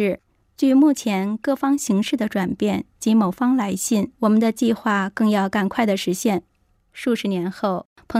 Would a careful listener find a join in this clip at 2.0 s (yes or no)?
no